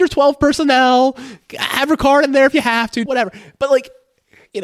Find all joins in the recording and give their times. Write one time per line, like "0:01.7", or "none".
0:03.1